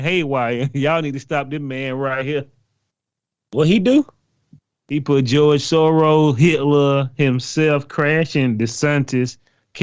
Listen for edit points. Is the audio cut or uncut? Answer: uncut